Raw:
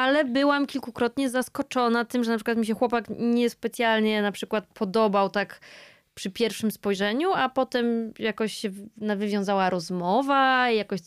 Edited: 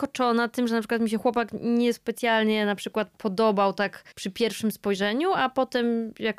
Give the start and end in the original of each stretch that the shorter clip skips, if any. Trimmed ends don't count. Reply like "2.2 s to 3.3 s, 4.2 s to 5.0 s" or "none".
5.7 s to 6.1 s